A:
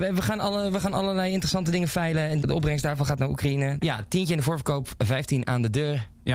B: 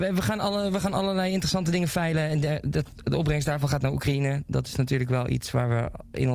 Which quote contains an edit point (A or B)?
A